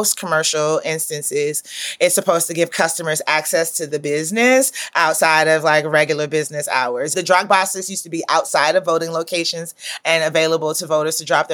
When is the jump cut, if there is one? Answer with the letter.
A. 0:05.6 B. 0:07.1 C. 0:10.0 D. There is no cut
C